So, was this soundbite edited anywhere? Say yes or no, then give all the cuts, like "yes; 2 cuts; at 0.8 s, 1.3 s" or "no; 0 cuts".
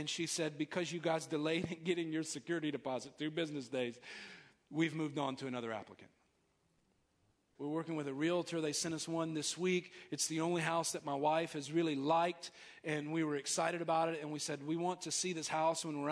yes; 1 cut; at 7.5 s